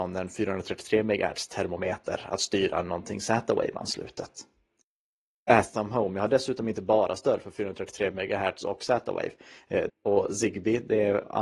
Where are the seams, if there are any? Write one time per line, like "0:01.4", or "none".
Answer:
0:09.9